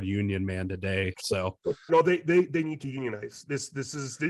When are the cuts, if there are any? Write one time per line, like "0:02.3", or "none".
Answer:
0:01.9